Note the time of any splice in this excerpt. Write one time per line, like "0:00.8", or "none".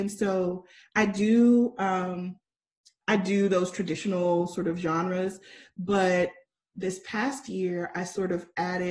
none